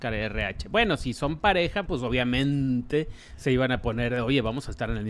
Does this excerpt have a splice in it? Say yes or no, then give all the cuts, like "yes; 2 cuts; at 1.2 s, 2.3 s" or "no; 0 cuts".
yes; 1 cut; at 1.9 s